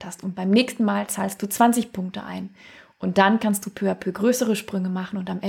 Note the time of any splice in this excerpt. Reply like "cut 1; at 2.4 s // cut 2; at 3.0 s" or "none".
none